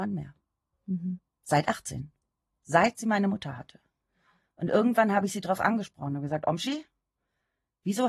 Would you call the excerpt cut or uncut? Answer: uncut